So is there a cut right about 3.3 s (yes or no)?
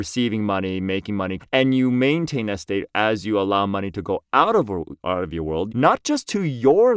no